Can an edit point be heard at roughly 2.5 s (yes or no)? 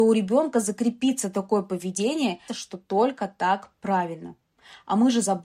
yes